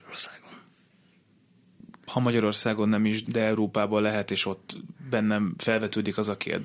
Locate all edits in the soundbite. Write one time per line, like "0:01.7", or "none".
0:03.2